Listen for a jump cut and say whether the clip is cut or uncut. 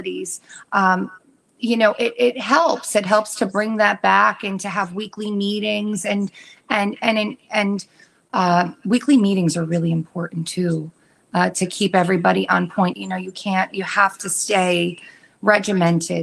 cut